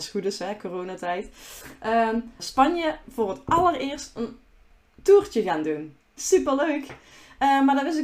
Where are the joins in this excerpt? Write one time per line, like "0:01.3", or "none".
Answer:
0:02.4

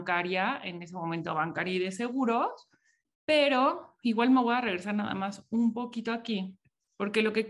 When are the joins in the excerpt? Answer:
0:03.0

